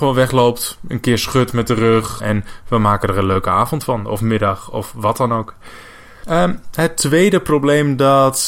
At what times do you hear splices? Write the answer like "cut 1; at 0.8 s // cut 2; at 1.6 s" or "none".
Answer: cut 1; at 2.2 s

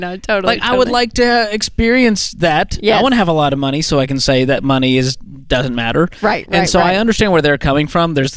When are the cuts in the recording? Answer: none

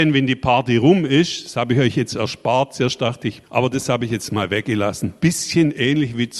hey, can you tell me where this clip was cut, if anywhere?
cut 1; at 3.4 s // cut 2; at 5.2 s

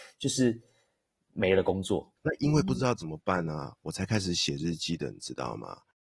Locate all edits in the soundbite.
cut 1; at 2.2 s

